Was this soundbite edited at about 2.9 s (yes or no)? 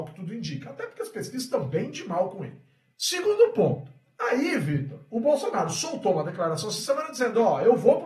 yes